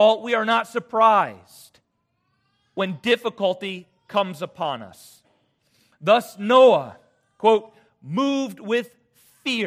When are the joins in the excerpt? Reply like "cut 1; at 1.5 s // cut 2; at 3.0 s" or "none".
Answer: none